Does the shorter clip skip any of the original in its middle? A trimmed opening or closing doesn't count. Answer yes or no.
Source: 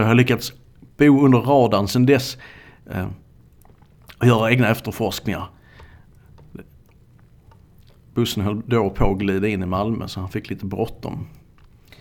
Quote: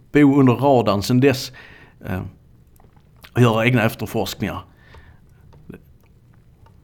no